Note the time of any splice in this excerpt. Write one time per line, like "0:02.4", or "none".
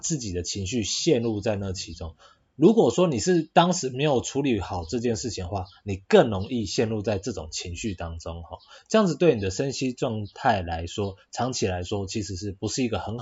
none